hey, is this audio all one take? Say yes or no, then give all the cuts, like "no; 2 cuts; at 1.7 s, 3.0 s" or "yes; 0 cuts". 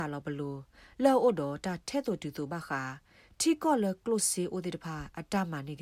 yes; 0 cuts